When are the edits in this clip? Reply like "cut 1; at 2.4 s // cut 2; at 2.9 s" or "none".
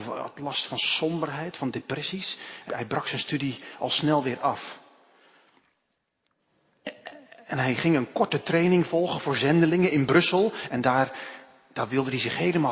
cut 1; at 2.7 s // cut 2; at 10.7 s